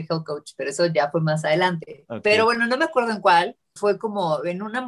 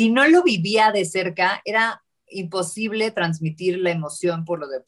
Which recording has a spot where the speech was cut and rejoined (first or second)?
first